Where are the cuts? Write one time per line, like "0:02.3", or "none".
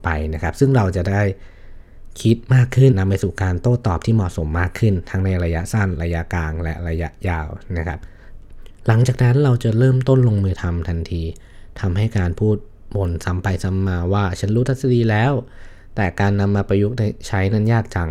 0:02.9